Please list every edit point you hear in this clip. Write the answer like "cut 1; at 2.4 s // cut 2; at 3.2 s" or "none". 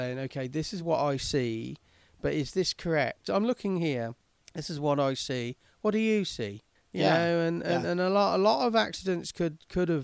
cut 1; at 3.3 s